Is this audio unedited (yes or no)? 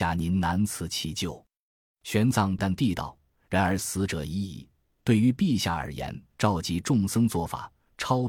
no